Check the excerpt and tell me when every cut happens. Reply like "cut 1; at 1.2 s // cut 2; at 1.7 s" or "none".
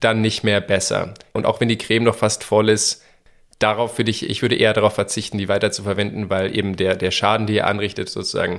cut 1; at 1.4 s